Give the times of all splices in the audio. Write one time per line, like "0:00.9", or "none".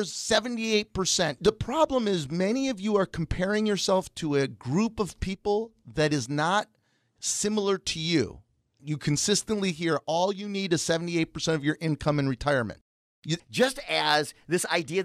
0:01.4
0:08.8
0:13.4